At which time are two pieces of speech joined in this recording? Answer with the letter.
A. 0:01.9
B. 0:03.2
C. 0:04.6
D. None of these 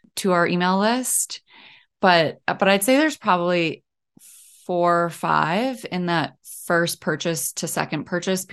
D